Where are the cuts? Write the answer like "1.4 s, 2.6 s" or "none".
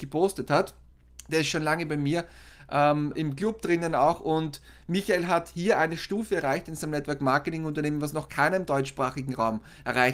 3.1 s